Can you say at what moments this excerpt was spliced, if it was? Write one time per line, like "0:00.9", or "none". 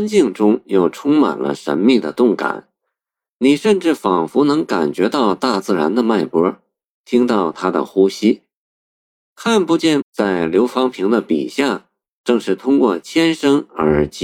0:10.0